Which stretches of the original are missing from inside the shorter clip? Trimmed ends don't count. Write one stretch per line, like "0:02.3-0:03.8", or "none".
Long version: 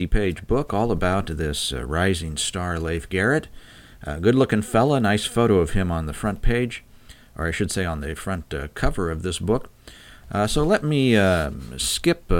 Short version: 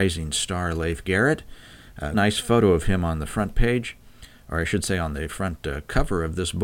0:04.2-0:05.0